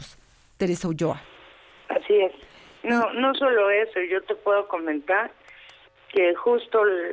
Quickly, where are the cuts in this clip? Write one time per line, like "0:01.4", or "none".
none